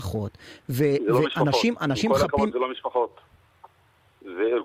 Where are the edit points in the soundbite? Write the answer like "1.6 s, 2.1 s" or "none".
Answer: none